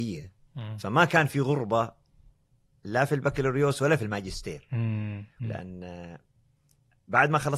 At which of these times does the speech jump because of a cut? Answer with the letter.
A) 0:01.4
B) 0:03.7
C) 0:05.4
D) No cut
C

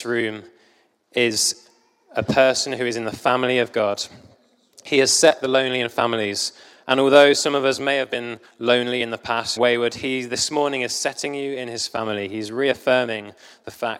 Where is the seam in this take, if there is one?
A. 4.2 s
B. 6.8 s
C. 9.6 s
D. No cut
C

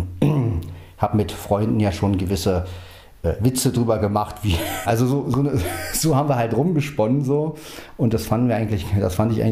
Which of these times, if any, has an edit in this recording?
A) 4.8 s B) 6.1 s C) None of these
A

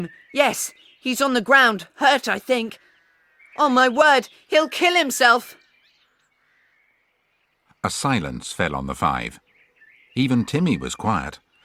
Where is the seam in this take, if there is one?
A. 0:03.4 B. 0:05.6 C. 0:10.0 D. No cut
A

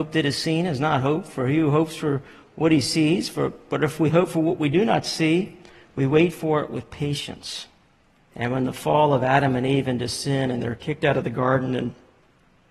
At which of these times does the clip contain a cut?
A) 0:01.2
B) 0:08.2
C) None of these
B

